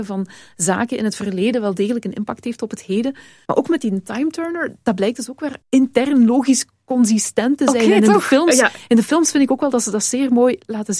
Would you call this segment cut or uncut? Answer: uncut